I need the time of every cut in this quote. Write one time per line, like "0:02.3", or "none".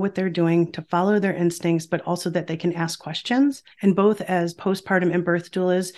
0:03.7